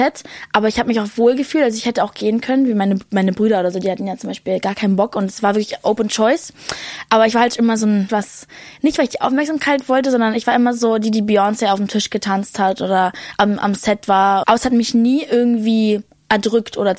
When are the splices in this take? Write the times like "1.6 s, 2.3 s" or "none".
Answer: 8.1 s, 14.4 s